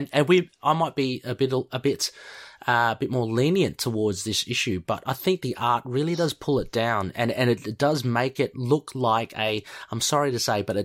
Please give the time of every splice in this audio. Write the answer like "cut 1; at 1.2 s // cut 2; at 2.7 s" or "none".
none